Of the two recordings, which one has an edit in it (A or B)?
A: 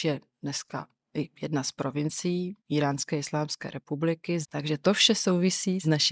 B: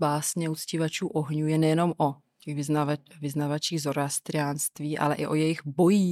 A